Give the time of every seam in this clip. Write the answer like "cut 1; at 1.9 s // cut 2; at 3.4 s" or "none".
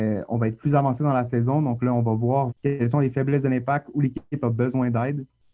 cut 1; at 2.5 s